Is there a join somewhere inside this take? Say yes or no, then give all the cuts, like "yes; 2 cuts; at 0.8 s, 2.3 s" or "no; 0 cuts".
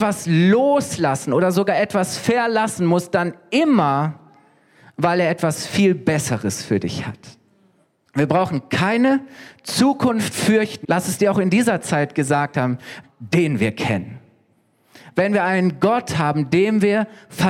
yes; 3 cuts; at 8.1 s, 10.8 s, 13.0 s